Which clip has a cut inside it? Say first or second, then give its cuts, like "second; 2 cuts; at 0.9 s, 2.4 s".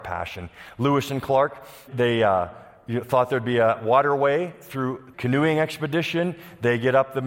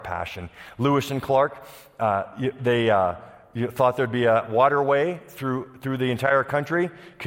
first; 2 cuts; at 1.9 s, 5.1 s